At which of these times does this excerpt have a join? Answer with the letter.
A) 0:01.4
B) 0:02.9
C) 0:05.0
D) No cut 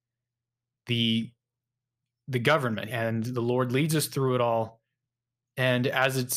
B